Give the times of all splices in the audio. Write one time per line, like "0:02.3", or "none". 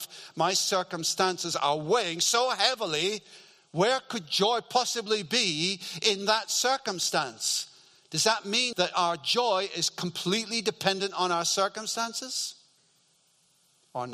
0:08.7

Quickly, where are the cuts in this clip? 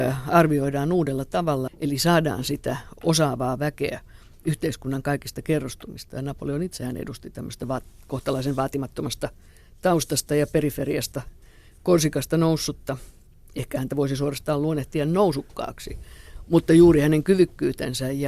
0:01.7

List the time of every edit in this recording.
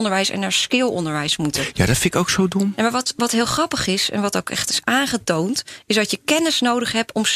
none

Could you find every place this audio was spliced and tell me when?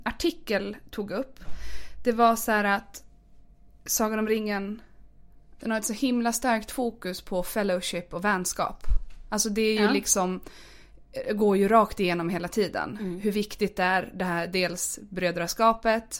0:05.6

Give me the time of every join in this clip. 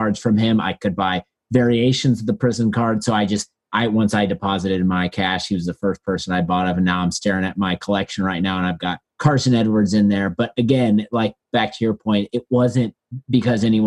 none

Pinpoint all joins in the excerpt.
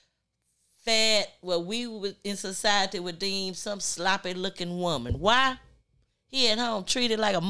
none

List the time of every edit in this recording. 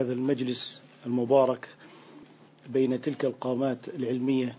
none

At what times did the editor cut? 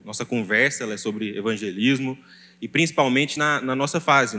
none

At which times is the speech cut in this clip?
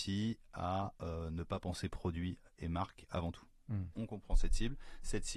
0:03.9

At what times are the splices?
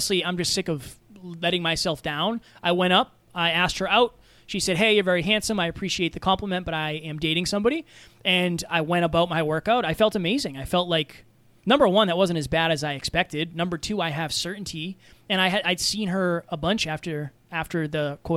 none

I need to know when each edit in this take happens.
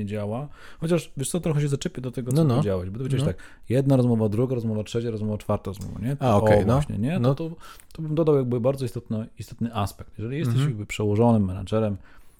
none

